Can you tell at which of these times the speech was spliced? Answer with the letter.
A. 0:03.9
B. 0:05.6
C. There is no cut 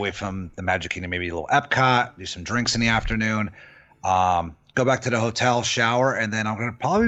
C